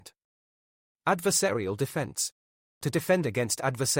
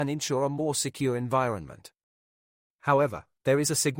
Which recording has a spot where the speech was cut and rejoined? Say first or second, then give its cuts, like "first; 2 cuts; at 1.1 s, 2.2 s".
second; 1 cut; at 2.6 s